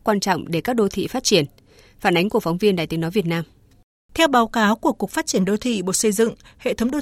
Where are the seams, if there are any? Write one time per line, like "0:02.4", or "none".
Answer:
none